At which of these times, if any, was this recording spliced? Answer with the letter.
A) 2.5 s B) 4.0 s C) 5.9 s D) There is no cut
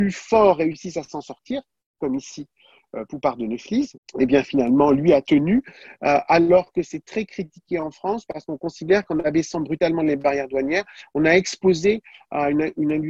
B